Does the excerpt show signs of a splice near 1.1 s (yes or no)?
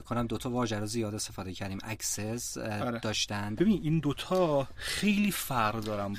no